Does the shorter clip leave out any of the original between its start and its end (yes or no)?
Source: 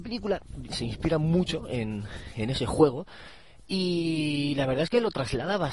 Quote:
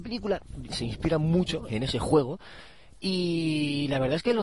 yes